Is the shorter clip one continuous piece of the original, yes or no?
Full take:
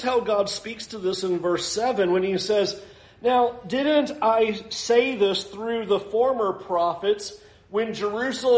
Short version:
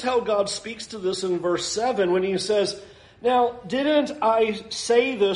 yes